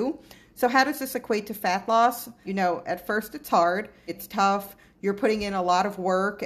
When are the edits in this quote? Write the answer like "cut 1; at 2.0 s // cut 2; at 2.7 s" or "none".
cut 1; at 2.4 s // cut 2; at 4.1 s

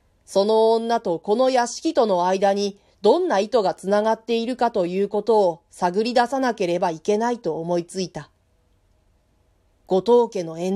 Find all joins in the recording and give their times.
none

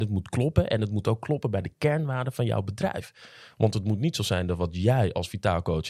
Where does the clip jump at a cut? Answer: none

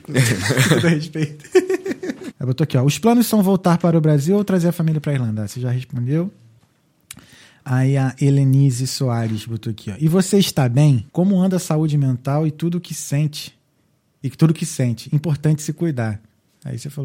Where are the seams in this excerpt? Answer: cut 1; at 2.3 s // cut 2; at 11.1 s

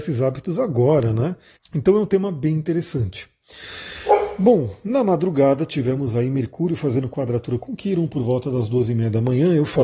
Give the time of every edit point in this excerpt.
cut 1; at 1.6 s

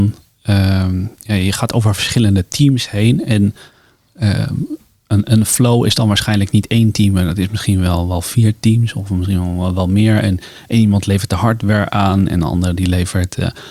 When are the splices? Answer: none

